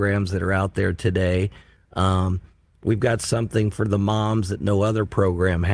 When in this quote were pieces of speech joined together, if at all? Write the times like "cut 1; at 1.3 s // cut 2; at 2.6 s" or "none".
none